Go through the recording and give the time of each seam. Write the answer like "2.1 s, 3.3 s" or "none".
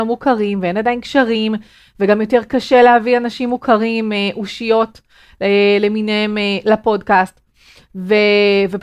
none